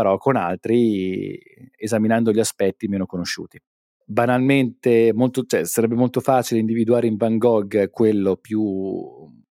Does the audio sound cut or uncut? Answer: cut